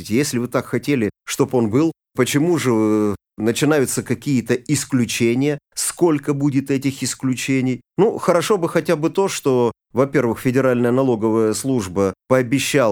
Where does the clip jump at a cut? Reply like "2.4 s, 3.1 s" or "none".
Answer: 7.8 s